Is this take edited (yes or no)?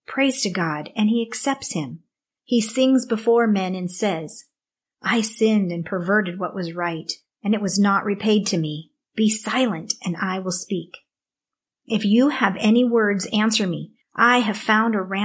yes